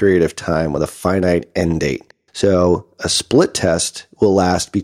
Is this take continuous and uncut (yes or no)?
yes